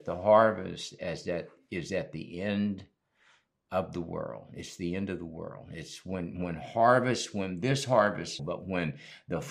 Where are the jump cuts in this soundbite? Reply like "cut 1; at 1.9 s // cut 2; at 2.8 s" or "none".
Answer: cut 1; at 8.4 s